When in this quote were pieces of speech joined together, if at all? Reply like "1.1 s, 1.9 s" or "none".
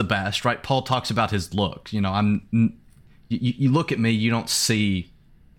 none